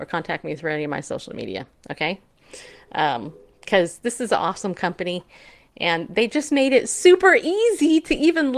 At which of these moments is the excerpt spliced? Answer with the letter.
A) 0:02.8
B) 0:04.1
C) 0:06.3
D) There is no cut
D